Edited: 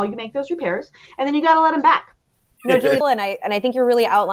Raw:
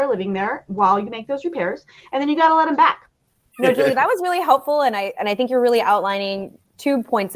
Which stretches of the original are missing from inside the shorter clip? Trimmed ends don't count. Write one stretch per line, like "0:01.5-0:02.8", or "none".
0:03.9-0:04.8